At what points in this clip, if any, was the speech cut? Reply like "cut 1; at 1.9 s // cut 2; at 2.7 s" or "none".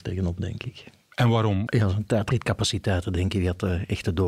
cut 1; at 1.7 s

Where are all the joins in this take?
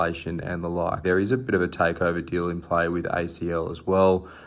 cut 1; at 1.0 s

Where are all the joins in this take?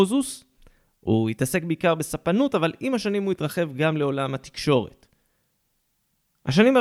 none

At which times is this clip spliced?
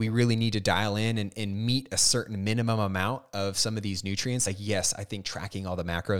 none

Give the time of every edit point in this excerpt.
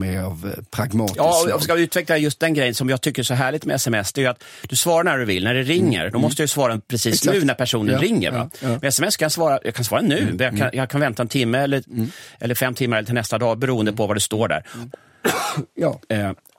cut 1; at 14.9 s

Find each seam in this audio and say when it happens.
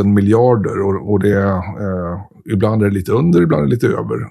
none

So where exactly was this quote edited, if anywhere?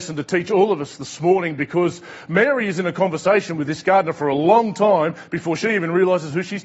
none

